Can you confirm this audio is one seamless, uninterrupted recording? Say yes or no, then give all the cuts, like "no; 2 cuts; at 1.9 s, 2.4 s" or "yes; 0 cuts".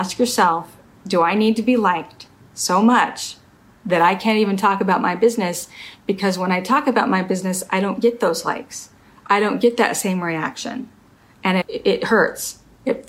yes; 0 cuts